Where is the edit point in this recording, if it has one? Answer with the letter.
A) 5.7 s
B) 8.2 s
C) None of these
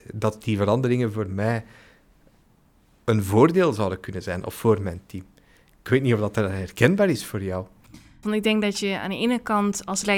B